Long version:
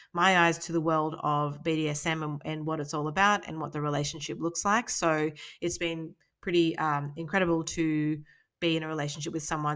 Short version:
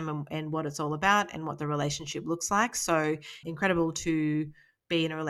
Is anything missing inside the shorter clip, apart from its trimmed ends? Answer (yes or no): yes